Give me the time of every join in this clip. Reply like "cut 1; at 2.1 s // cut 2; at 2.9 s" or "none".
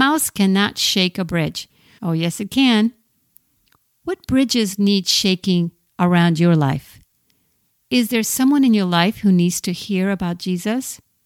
cut 1; at 2.0 s